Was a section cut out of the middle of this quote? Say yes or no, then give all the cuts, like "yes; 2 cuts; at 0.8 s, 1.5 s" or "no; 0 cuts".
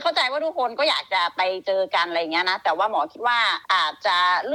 yes; 1 cut; at 3.6 s